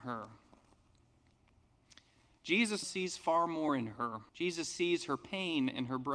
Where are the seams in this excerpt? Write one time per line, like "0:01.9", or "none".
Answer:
0:02.8
0:04.3

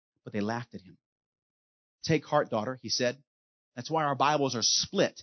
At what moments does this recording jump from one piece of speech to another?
0:01.9
0:03.7

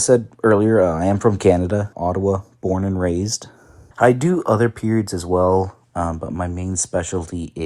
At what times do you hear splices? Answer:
0:01.9
0:03.9

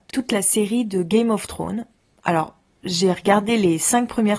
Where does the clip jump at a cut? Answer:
none

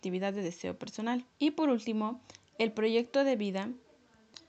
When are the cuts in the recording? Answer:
0:01.3

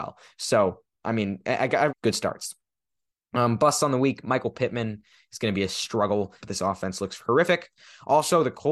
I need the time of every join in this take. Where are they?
0:01.9
0:06.4

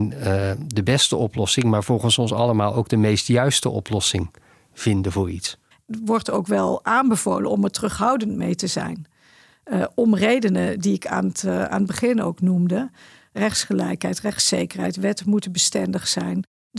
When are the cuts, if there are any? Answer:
0:05.7

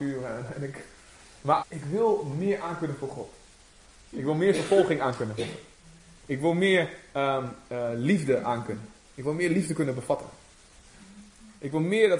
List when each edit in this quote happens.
0:01.6
0:04.1

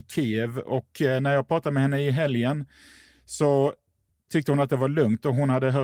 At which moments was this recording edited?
none

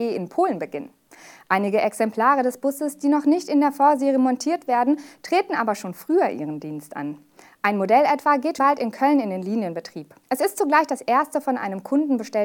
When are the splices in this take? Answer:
0:08.6
0:10.2

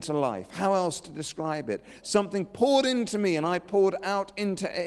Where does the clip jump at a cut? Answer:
0:02.0

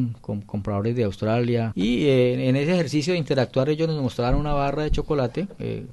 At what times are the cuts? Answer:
0:01.7

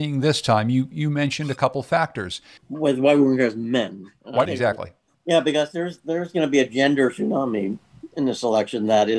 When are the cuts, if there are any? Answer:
0:02.6
0:04.5

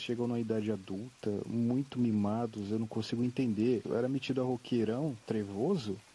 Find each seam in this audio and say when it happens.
0:03.8

